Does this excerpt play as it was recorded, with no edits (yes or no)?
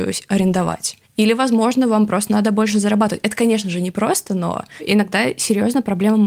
yes